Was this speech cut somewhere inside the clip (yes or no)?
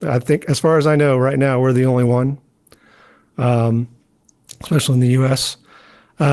no